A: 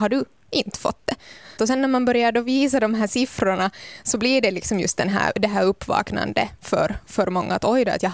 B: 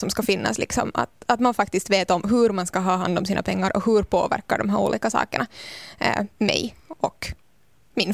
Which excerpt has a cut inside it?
A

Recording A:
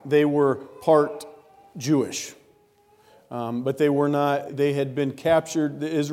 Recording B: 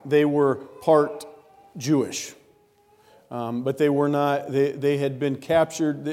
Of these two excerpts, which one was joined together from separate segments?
A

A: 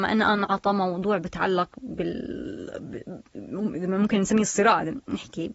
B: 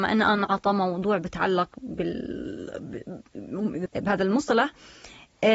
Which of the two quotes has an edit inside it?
B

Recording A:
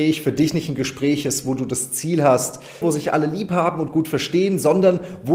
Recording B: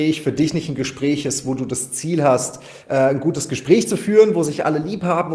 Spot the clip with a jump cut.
A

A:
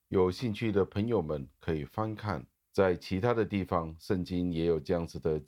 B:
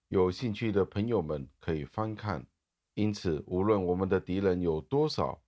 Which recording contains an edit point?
A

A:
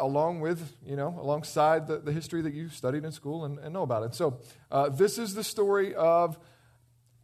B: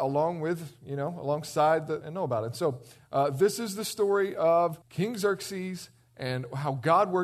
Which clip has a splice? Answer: B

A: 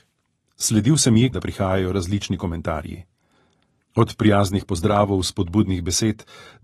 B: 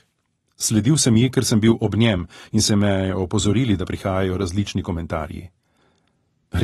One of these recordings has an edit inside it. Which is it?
A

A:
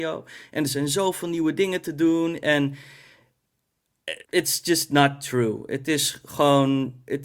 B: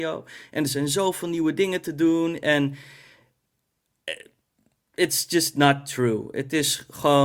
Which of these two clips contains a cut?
A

